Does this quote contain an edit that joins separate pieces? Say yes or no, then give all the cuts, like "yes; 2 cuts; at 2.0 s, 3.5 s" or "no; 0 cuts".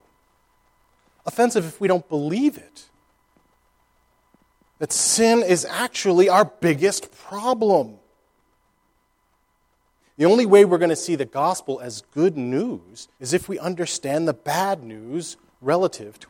yes; 2 cuts; at 10.0 s, 13.1 s